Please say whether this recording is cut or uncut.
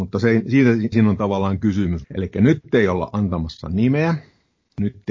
cut